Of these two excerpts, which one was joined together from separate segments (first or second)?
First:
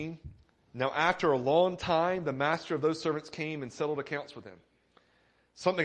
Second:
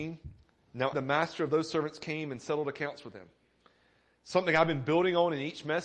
second